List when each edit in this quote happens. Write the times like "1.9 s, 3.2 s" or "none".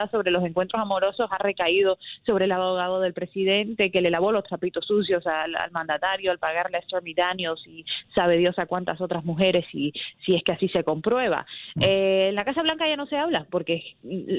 none

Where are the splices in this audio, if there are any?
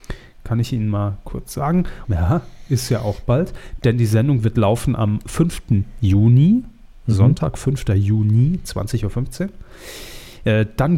2.0 s

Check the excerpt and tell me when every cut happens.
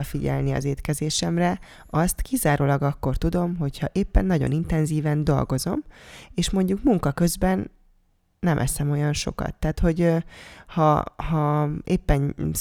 none

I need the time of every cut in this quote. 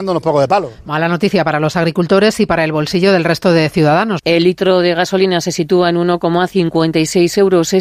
4.2 s

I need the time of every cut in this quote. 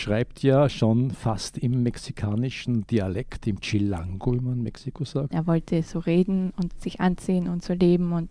5.3 s, 6.7 s

